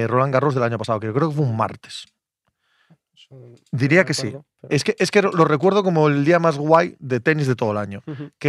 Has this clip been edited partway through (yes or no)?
no